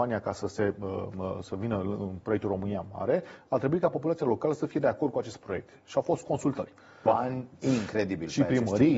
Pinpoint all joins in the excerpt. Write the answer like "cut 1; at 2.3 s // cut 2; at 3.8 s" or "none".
cut 1; at 7.1 s

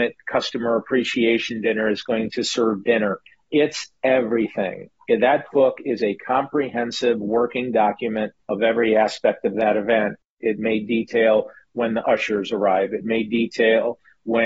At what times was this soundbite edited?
cut 1; at 10.4 s

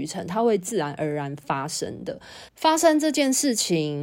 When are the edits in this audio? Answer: cut 1; at 2.5 s

